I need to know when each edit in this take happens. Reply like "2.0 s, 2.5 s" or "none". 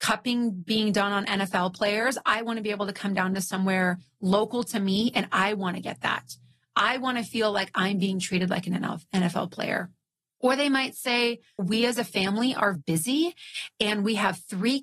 11.6 s, 12.7 s